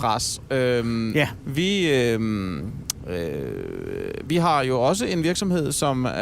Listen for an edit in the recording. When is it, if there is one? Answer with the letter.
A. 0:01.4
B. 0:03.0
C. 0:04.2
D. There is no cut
A